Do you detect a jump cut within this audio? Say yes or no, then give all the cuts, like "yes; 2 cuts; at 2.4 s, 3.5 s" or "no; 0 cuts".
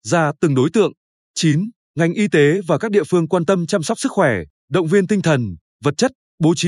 no; 0 cuts